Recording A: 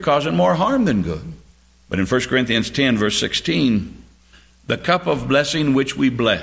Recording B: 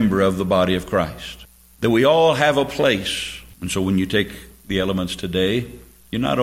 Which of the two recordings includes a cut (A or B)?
B